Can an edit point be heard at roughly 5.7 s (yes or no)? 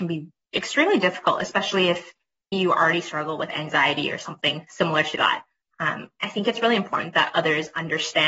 yes